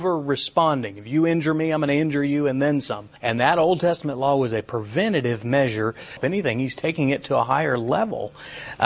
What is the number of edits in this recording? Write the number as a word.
two